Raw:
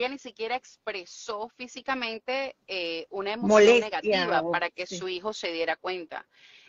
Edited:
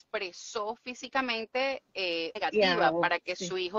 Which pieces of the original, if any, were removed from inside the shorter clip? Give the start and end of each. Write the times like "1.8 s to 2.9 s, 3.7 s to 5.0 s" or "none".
3.1 s to 3.9 s